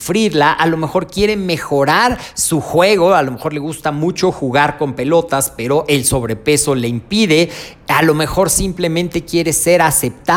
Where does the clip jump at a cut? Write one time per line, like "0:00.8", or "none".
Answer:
none